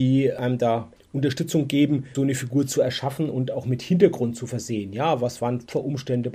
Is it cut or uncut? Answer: cut